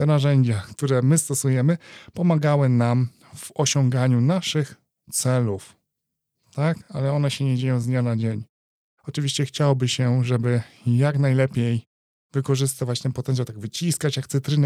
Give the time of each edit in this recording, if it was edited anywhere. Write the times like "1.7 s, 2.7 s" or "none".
none